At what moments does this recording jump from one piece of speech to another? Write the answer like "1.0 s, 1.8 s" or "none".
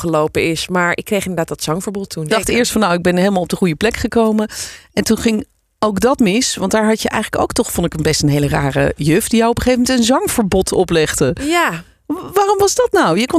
2.3 s